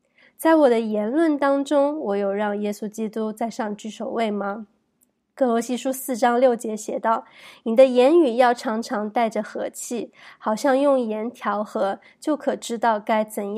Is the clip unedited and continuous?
yes; 0 cuts

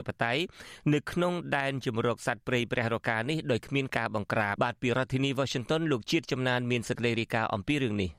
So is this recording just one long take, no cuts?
no; 1 cut; at 4.6 s

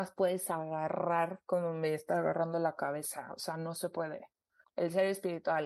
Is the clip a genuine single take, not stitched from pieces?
no; 1 cut; at 4.6 s

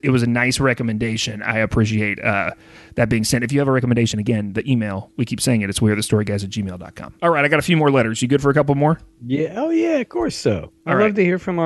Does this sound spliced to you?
no; 0 cuts

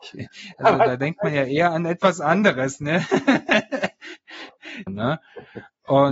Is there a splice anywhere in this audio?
yes; 1 cut; at 4.9 s

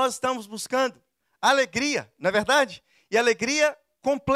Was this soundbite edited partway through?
no; 0 cuts

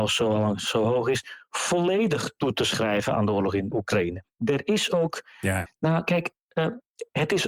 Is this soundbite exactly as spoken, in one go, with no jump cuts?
no; 2 cuts; at 3.7 s, 5.7 s

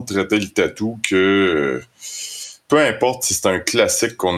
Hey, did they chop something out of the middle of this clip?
no; 0 cuts

